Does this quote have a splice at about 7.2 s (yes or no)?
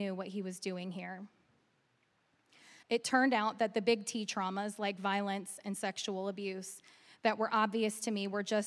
no